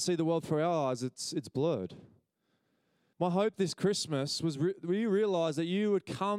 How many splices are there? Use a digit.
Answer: 1